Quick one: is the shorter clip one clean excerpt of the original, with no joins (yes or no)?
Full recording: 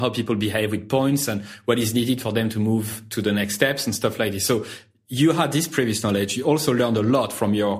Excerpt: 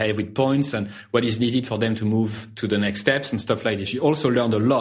no